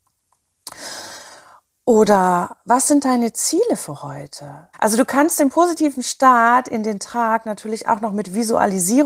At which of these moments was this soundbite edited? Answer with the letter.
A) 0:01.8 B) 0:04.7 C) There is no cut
B